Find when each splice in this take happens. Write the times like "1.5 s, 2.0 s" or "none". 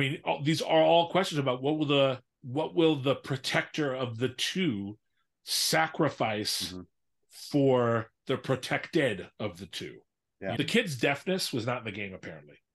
2.3 s, 10.6 s